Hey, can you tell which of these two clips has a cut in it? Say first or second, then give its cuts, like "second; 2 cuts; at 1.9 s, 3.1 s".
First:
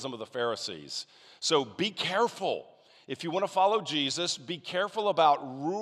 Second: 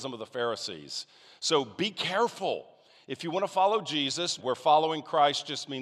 second; 1 cut; at 4.4 s